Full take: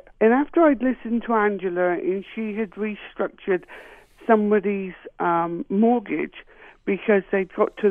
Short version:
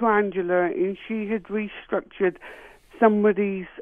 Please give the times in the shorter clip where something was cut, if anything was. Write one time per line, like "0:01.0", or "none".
none